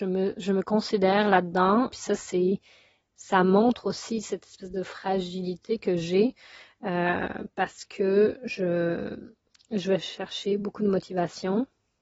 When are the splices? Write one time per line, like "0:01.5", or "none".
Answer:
0:01.9